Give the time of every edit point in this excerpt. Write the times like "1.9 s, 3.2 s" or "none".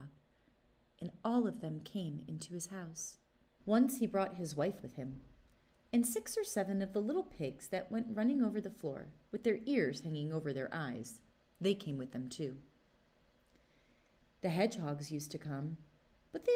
3.6 s

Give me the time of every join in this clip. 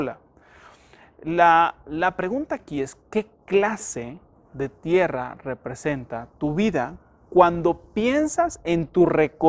none

